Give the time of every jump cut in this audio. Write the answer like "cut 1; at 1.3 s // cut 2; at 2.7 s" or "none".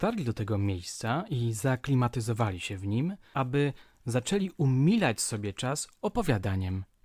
cut 1; at 3.3 s